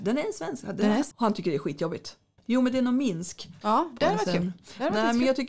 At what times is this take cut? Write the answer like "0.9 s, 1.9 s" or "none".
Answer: 1.1 s, 2.4 s, 3.6 s

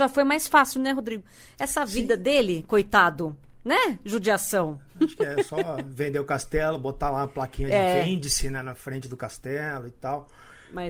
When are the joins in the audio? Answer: none

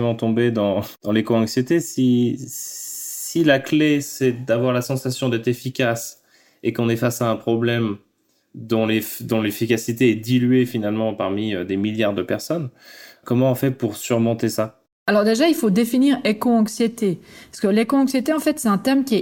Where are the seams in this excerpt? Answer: 13.2 s

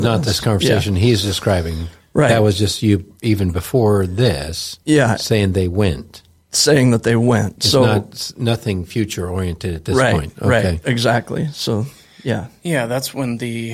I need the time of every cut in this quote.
none

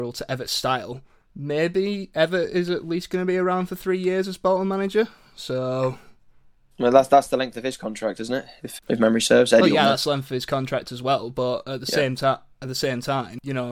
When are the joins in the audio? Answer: 8.8 s

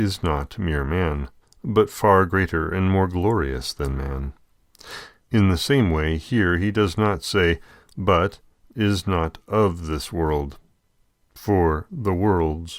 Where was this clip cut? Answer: 5.2 s, 7.9 s

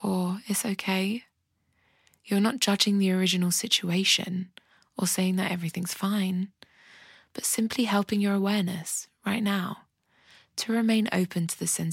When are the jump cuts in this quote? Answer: none

